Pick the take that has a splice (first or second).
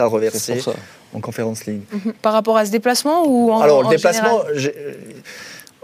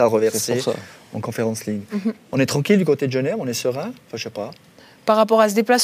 first